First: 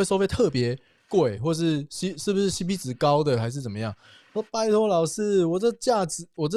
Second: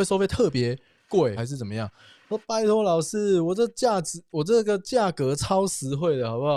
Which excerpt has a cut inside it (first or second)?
second